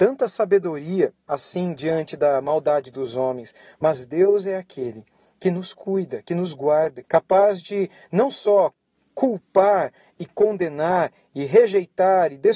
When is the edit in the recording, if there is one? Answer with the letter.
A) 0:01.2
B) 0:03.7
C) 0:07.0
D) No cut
C